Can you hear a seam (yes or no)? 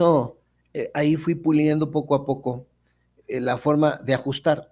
no